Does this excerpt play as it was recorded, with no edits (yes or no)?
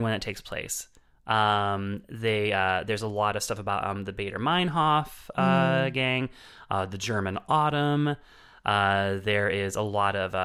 yes